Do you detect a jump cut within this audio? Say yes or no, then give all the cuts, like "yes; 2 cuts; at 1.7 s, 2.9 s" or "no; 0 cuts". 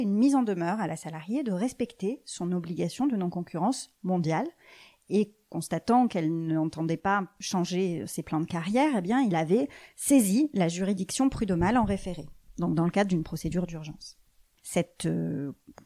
yes; 1 cut; at 14.6 s